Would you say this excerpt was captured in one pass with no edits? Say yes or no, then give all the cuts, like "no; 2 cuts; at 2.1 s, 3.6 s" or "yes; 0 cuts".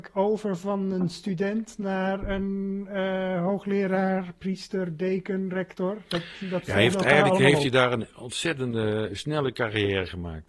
yes; 0 cuts